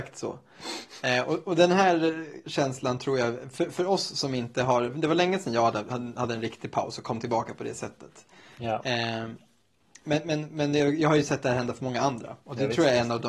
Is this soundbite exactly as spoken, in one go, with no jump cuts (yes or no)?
yes